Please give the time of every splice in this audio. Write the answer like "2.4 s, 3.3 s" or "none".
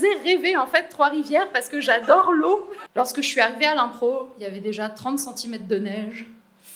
2.9 s